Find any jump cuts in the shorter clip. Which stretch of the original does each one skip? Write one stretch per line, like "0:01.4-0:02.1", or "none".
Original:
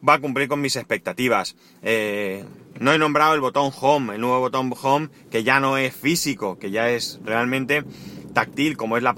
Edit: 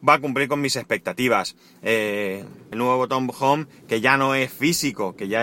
0:02.7-0:04.1